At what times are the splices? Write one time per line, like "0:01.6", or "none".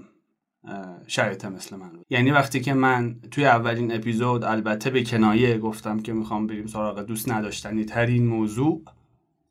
0:02.0